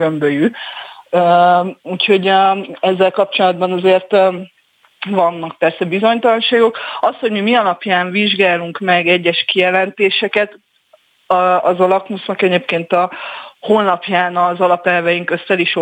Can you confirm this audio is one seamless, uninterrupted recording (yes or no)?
no